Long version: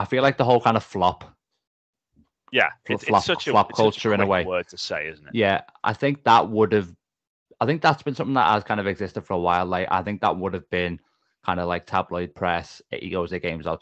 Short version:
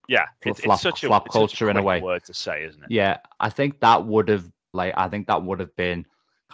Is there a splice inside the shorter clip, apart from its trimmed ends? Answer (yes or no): yes